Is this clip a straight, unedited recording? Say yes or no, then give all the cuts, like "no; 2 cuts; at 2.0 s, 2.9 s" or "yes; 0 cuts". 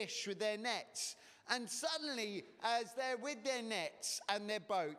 yes; 0 cuts